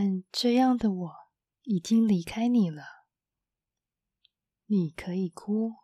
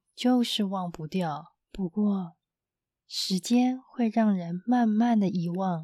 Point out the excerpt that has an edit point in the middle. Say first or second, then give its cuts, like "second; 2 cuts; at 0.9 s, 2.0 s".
second; 1 cut; at 1.6 s